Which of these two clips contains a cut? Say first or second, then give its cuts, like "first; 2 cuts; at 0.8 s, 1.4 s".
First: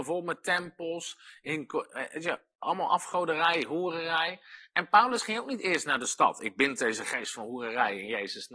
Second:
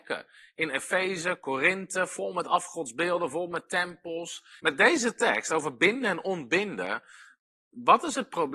second; 1 cut; at 4.6 s